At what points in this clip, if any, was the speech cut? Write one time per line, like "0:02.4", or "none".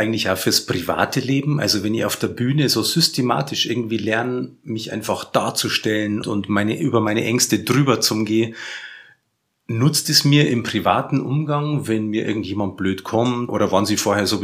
0:06.2
0:13.5